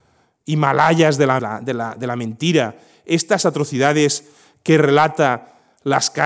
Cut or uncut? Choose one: cut